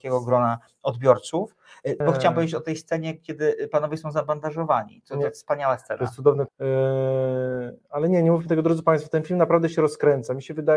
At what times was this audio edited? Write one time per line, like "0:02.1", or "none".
0:02.0
0:06.5